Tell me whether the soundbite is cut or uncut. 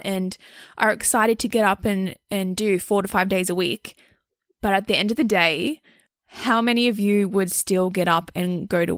cut